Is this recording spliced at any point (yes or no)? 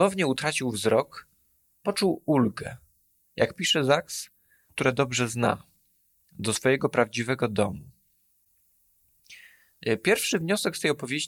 yes